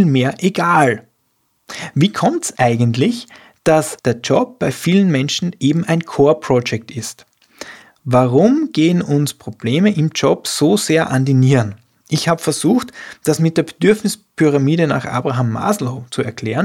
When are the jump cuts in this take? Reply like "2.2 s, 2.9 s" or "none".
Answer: none

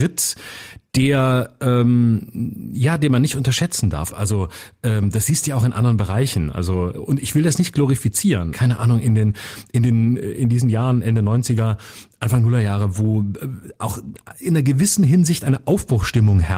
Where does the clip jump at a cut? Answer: 4.1 s, 6.9 s, 8.5 s

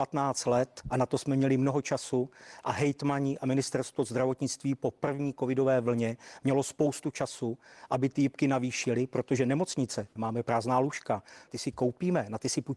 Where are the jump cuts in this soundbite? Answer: 10.2 s, 11.5 s

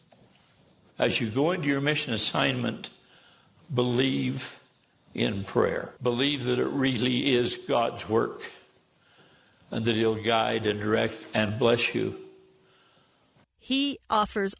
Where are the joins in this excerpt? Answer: 6.0 s, 13.4 s

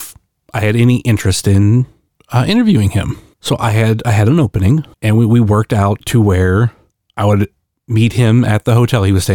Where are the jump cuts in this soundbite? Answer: 3.3 s, 4.9 s

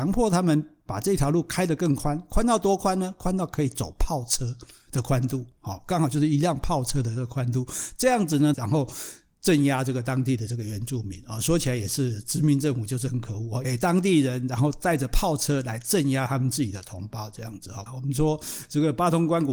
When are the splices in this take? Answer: 8.5 s, 13.6 s, 17.9 s

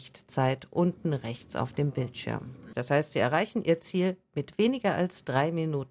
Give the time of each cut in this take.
2.7 s

